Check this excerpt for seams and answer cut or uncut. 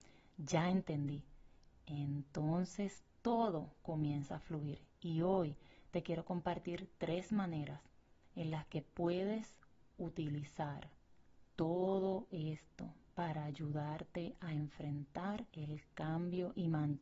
cut